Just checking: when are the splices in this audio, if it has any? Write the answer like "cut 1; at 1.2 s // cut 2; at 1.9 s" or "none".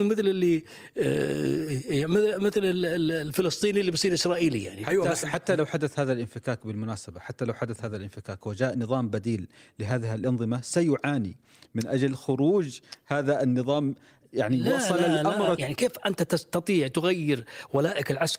cut 1; at 5.2 s // cut 2; at 15.5 s